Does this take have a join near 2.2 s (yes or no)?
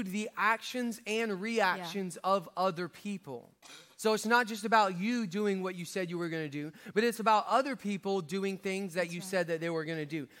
no